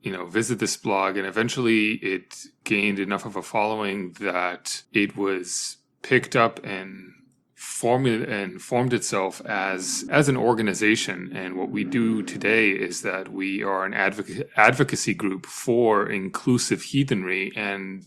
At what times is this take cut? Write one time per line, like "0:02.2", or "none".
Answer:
0:04.8
0:10.1